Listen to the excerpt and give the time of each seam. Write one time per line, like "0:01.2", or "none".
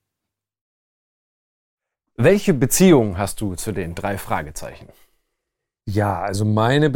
none